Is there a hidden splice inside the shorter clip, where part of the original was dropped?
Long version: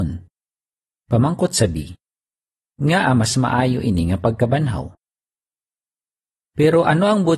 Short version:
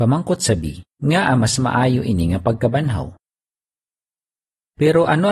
yes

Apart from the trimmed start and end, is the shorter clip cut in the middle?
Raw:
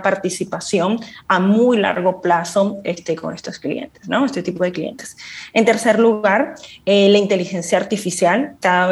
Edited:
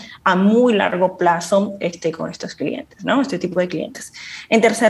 no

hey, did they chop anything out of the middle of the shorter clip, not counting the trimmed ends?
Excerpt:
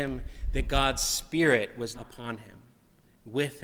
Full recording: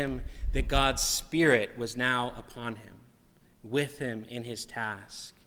yes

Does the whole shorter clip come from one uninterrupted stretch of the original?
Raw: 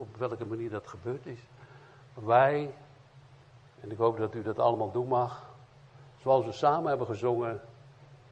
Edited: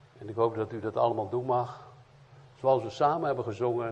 yes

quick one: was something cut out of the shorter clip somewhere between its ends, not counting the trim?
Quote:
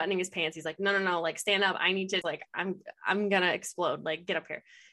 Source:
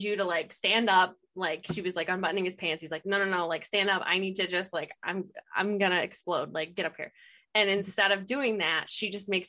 yes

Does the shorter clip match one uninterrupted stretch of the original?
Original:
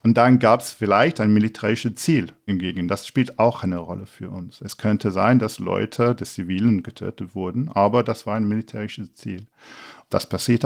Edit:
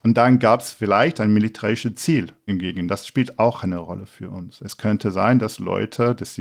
yes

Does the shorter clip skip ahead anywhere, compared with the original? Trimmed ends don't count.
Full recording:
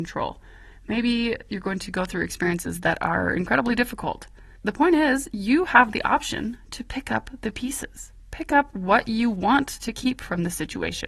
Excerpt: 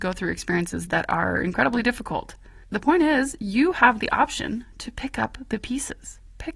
no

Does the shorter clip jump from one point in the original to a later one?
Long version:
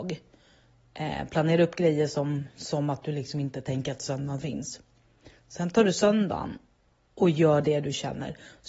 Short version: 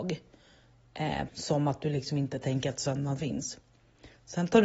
yes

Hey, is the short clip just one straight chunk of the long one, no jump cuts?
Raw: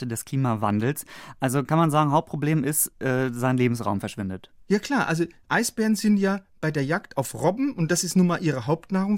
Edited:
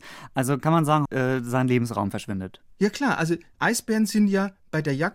no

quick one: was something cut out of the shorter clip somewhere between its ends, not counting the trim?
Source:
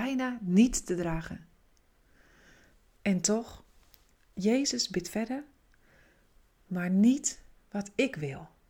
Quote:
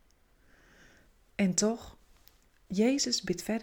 no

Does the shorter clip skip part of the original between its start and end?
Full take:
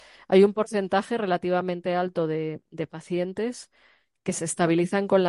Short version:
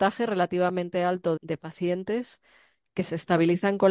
yes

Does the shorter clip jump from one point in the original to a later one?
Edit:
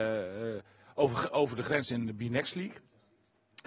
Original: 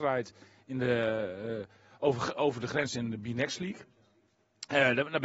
no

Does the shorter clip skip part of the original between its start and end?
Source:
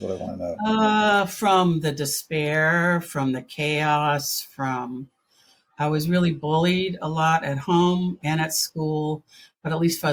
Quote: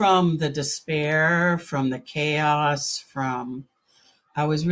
no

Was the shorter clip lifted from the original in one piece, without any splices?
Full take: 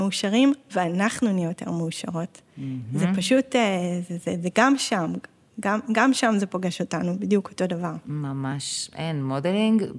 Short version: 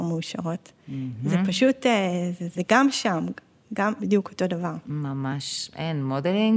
no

